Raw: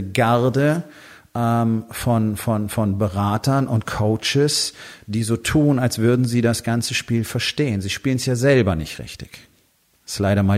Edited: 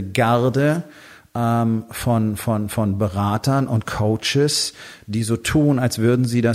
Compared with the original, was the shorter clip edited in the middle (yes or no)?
no